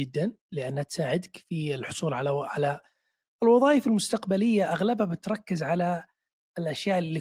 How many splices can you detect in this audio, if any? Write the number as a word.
zero